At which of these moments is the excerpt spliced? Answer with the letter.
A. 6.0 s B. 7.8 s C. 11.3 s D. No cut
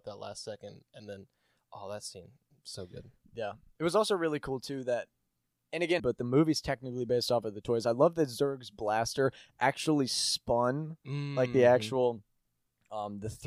A